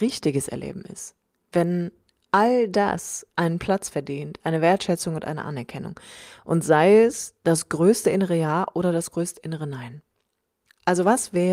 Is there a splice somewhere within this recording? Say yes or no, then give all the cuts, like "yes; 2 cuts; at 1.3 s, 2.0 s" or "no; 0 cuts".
no; 0 cuts